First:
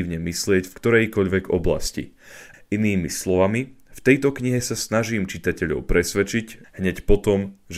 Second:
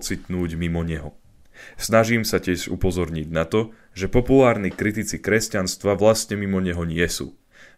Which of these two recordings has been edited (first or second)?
first